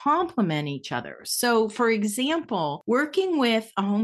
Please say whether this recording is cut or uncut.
uncut